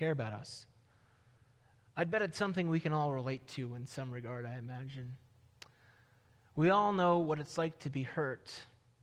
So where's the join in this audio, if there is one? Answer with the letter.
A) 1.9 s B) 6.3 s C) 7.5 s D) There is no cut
D